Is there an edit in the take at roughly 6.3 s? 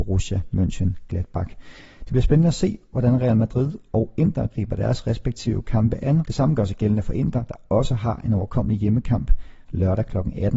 yes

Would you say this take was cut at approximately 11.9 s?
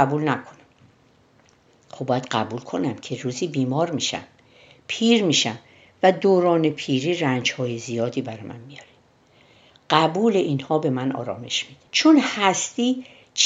yes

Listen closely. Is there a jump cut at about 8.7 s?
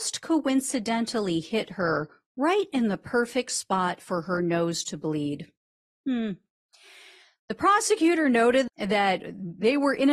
yes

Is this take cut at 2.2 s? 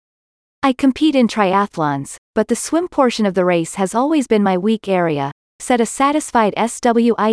no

